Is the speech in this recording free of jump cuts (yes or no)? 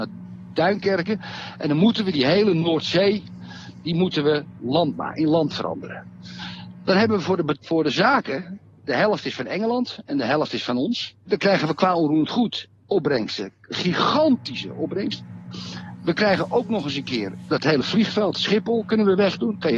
no